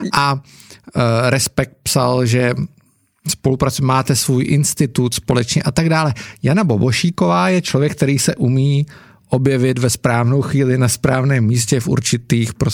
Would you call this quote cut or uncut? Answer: uncut